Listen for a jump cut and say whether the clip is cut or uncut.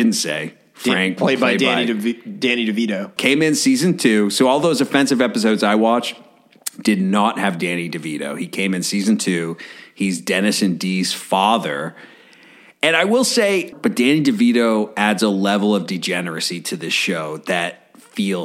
cut